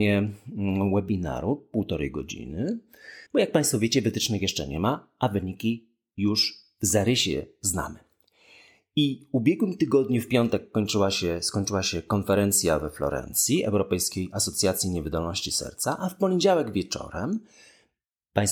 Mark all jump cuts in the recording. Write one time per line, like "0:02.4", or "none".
0:03.3